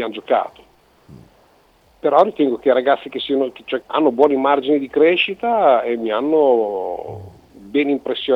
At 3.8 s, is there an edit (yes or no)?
yes